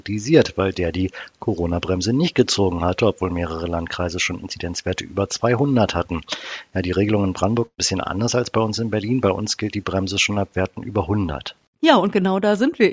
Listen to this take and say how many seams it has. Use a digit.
0